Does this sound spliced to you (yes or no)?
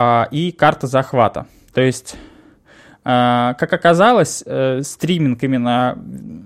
no